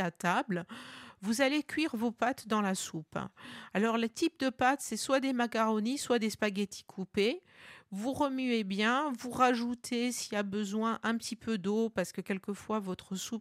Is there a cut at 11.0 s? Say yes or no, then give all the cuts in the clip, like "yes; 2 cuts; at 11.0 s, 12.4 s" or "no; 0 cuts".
no; 0 cuts